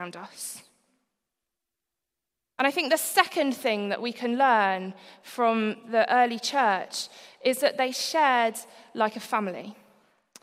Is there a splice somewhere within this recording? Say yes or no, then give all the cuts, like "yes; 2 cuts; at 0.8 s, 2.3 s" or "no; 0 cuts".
no; 0 cuts